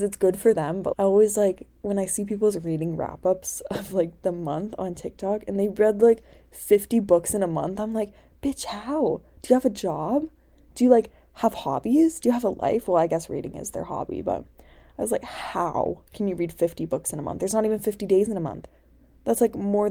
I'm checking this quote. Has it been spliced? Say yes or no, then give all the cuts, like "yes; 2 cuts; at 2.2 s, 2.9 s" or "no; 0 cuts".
yes; 1 cut; at 0.9 s